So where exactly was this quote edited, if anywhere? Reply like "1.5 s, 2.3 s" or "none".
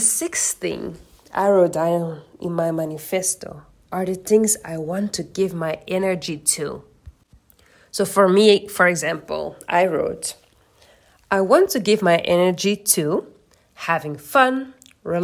none

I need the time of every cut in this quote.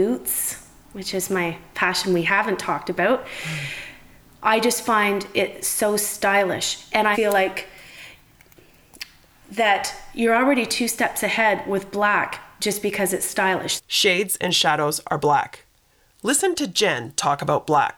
7.1 s, 13.8 s

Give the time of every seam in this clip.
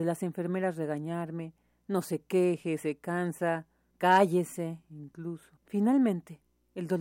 5.6 s

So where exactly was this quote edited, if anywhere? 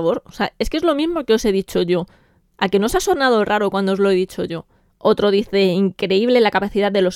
4.9 s

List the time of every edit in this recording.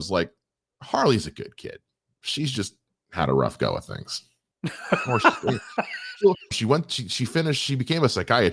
4.5 s, 6.5 s

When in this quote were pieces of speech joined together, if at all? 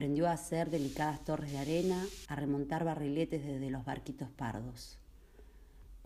2.2 s

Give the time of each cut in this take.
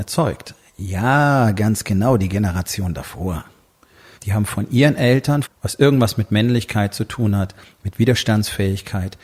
4.2 s, 5.4 s

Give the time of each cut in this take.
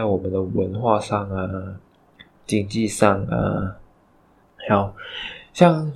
4.4 s

